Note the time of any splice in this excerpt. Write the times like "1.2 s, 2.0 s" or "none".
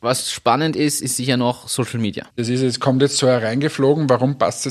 2.3 s